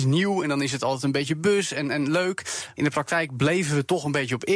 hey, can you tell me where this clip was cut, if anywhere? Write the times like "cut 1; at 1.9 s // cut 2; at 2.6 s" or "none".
cut 1; at 2.8 s